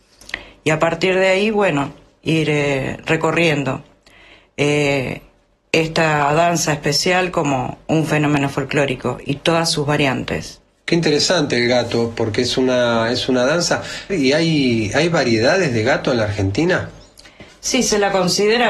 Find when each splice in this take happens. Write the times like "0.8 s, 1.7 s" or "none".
14.1 s